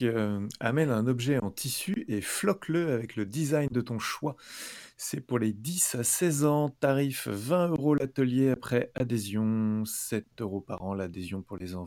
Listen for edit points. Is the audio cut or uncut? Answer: uncut